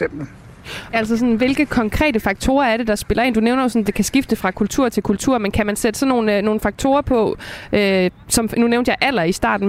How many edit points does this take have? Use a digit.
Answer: 1